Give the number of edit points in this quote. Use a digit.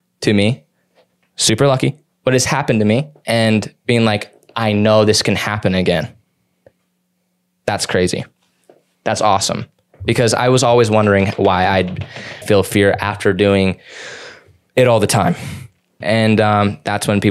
2